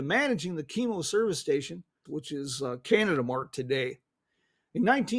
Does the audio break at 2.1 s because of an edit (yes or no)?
yes